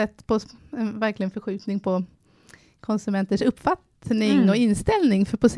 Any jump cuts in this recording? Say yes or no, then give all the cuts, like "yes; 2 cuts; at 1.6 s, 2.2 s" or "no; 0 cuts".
no; 0 cuts